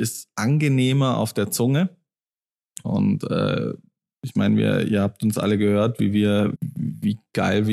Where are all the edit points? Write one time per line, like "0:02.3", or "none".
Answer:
0:02.8
0:06.5